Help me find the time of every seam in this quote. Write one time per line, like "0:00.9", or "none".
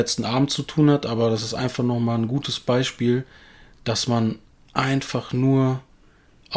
none